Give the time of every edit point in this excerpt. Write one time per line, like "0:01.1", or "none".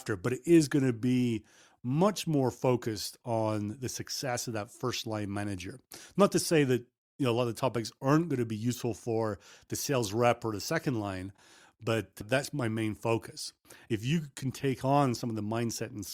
0:13.9